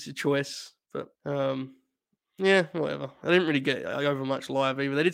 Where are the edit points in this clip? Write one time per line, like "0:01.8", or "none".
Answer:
0:01.2